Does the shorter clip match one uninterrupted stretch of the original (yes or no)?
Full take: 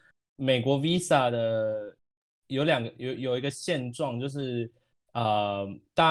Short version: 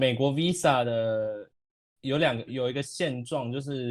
no